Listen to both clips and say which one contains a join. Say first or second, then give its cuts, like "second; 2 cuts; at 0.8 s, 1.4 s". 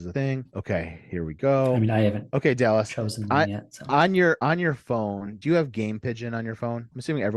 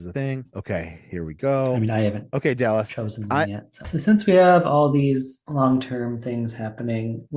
second; 1 cut; at 3.8 s